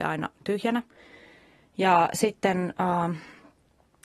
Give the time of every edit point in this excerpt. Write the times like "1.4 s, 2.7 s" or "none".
none